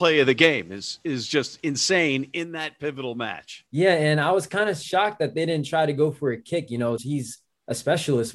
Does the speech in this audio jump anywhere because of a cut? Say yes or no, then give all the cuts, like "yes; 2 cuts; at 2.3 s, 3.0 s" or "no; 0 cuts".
yes; 1 cut; at 7.0 s